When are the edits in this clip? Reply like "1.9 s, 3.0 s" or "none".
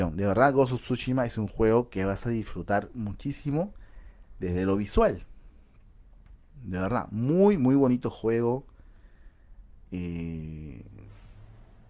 none